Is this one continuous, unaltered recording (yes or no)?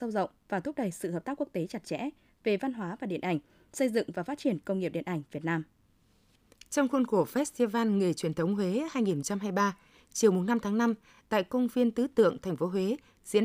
yes